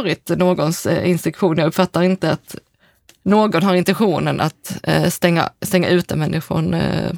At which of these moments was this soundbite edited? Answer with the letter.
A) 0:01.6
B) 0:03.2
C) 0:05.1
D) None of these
D